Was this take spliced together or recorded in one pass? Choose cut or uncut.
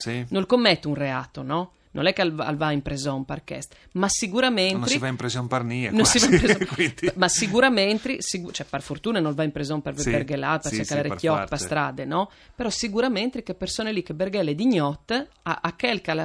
uncut